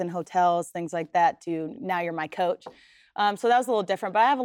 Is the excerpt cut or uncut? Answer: uncut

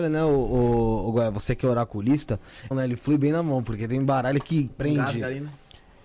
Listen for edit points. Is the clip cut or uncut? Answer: cut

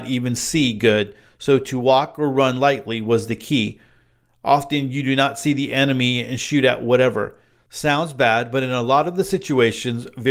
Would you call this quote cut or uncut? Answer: uncut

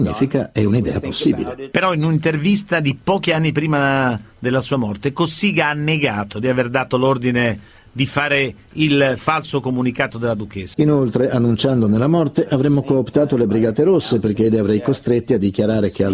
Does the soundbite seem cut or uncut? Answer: cut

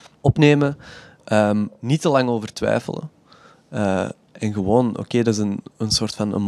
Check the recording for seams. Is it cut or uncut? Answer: uncut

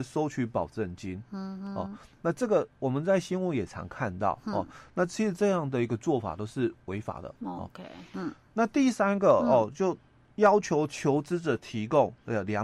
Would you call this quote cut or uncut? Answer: uncut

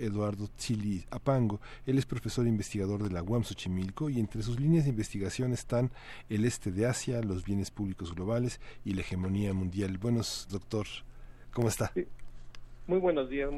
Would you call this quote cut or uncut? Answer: cut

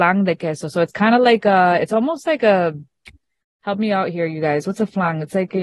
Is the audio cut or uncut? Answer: uncut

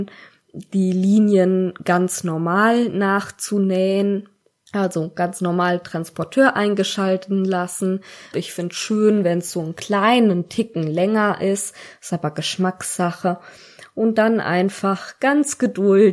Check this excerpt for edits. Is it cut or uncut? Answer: cut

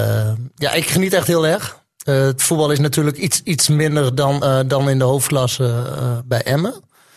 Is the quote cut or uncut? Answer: uncut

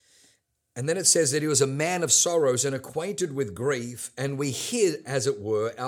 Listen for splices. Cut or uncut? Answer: uncut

